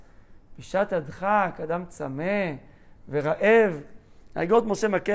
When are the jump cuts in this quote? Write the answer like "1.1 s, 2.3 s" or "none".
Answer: none

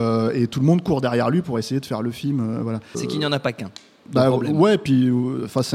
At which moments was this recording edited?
2.9 s

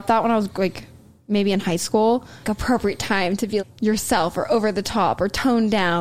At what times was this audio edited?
2.4 s, 3.6 s

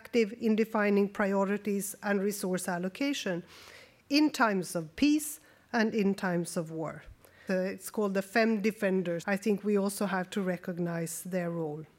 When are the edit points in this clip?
7.5 s, 9.2 s

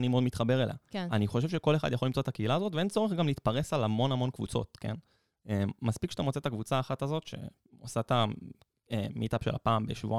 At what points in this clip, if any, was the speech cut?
none

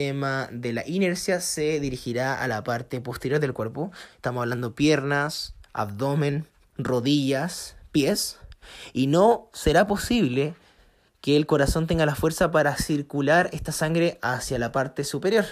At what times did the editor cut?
6.7 s

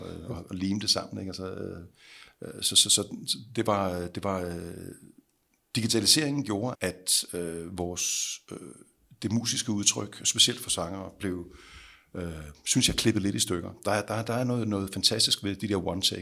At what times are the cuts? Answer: 6.7 s

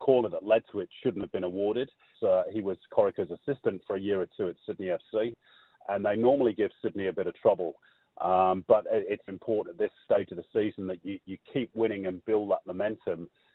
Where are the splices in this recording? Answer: 2.1 s, 9.3 s

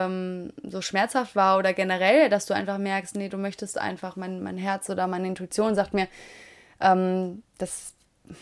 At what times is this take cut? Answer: none

